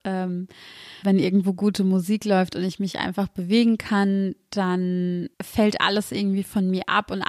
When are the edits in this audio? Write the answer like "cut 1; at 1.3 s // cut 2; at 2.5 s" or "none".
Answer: cut 1; at 1.0 s // cut 2; at 5.3 s